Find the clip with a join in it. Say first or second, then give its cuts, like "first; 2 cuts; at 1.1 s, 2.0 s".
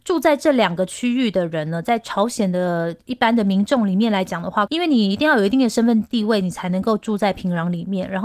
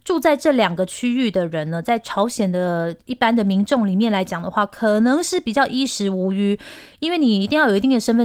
first; 1 cut; at 4.7 s